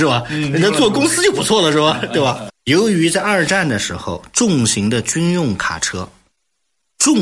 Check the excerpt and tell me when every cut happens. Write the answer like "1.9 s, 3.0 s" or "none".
2.5 s